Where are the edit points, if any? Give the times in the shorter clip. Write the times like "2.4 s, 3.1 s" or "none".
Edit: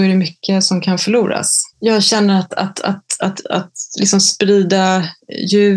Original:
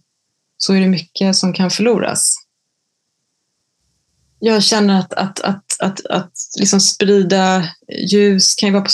1.7 s